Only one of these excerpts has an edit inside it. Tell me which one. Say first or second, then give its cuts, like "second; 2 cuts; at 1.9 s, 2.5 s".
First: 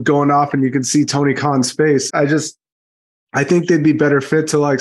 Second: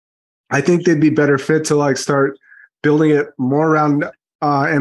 first; 1 cut; at 2.1 s